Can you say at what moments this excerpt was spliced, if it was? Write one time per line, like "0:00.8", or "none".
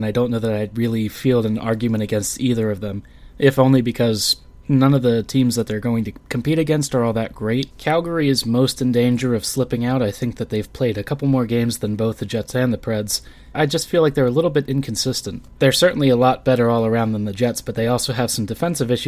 0:07.7
0:13.5